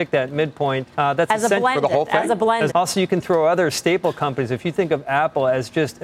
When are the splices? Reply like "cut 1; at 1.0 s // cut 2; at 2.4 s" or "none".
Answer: cut 1; at 0.9 s // cut 2; at 2.7 s